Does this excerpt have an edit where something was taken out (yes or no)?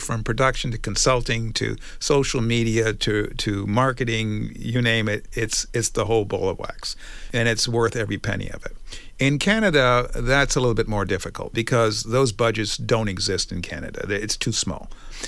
no